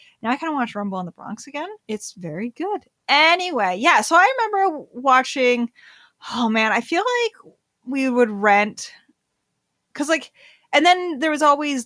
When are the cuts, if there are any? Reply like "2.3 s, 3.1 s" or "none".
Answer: 1.8 s